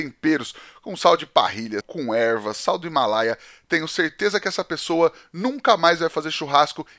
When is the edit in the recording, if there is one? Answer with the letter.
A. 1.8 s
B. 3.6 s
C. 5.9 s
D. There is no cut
A